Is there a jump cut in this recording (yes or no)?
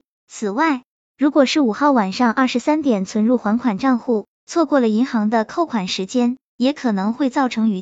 no